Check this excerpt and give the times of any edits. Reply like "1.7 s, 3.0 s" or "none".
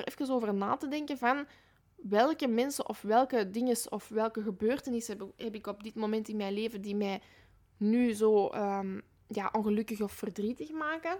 none